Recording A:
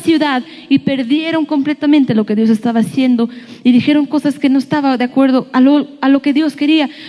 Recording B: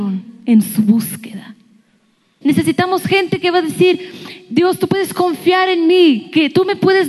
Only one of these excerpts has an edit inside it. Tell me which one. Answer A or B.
B